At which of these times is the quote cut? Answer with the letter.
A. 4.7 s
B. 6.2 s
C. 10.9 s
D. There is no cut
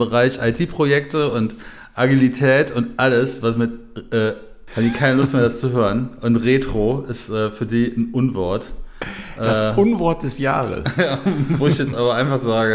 A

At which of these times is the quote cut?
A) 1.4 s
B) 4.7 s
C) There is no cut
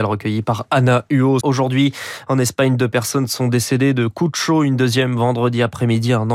A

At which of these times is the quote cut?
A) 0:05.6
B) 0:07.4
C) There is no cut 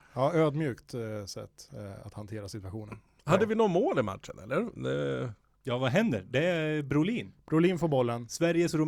A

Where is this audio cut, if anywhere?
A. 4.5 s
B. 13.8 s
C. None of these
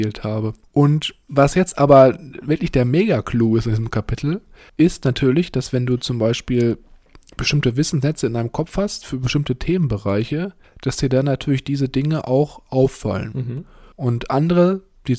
C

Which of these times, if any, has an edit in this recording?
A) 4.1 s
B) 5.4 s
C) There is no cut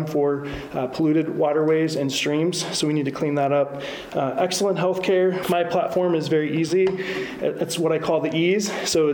B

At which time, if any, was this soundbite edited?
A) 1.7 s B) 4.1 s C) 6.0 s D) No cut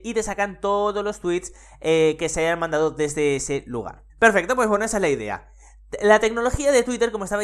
B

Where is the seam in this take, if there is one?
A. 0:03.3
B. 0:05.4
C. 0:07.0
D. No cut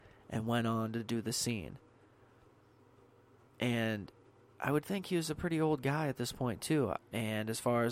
C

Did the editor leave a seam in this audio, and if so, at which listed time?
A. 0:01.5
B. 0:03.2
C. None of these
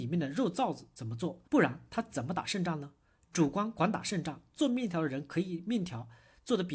A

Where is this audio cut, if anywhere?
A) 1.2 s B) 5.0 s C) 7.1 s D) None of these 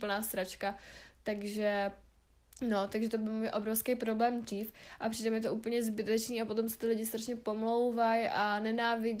B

